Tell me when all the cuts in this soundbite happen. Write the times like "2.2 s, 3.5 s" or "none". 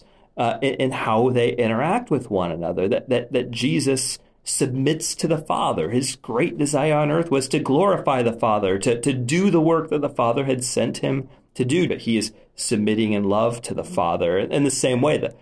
11.9 s